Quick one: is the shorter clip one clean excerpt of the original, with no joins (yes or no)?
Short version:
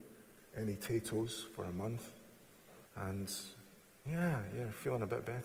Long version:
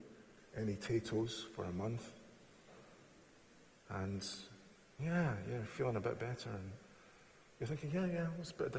no